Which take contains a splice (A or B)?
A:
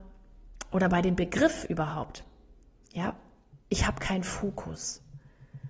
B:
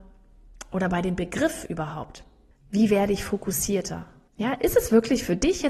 B